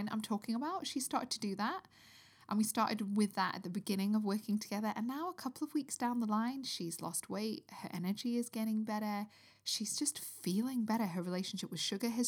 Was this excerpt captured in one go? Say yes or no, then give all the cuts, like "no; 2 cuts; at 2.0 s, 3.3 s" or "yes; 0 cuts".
yes; 0 cuts